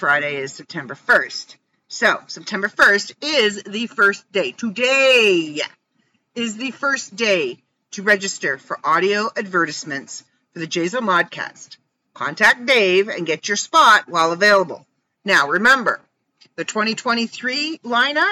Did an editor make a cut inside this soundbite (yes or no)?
no